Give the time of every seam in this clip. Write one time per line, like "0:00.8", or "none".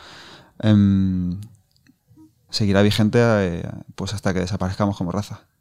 0:02.5